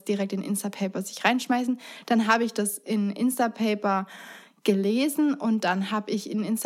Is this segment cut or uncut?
uncut